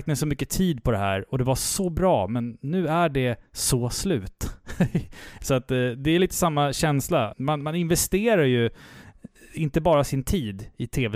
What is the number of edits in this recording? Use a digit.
2